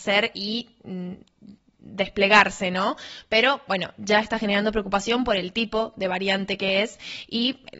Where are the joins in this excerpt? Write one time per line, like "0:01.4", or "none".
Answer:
none